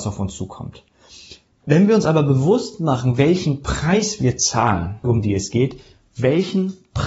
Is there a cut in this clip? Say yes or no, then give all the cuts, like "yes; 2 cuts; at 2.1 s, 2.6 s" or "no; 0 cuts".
yes; 2 cuts; at 1.5 s, 5.0 s